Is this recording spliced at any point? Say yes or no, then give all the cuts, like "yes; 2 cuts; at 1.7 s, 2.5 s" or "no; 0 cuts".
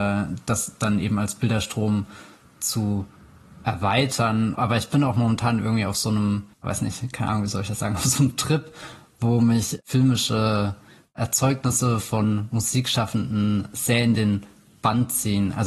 yes; 2 cuts; at 4.5 s, 6.5 s